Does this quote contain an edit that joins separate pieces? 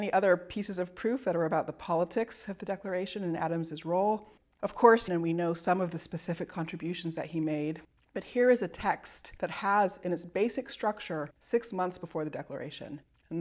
yes; 2 cuts; at 5.1 s, 11.3 s

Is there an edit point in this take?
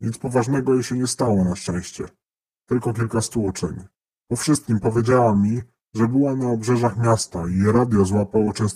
no; 0 cuts

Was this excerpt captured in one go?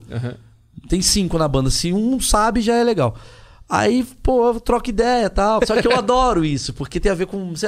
no; 1 cut; at 5.6 s

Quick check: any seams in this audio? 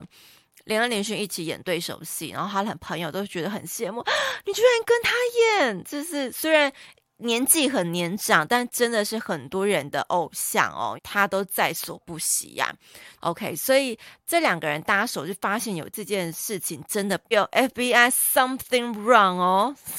yes; 3 cuts; at 11.0 s, 13.2 s, 17.3 s

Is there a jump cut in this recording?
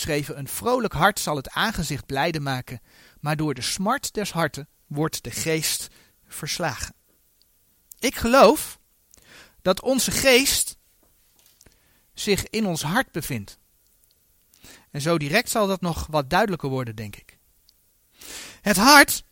no; 0 cuts

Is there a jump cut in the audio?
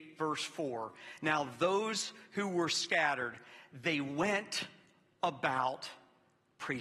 no; 0 cuts

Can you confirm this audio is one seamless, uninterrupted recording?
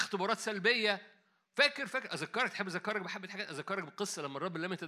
no; 1 cut; at 1.9 s

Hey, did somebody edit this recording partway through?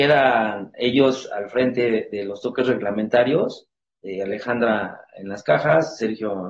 no; 0 cuts

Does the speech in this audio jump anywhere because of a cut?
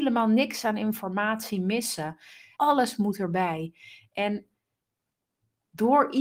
yes; 1 cut; at 2.6 s

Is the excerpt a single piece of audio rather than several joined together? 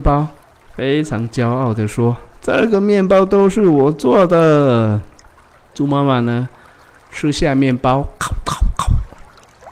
yes; 0 cuts

